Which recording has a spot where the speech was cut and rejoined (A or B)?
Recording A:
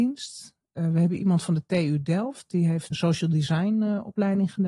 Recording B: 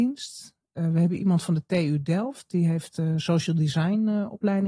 A